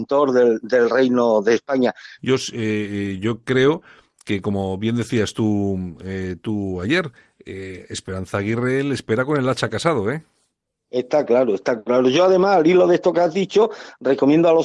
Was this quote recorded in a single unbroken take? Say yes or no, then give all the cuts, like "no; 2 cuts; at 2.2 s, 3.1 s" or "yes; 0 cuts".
no; 1 cut; at 2.2 s